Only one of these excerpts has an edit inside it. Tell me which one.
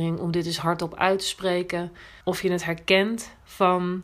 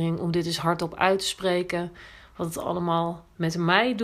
first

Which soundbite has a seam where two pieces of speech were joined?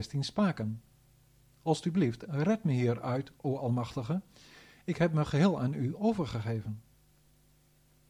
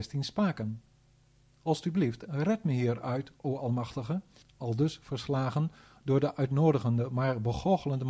second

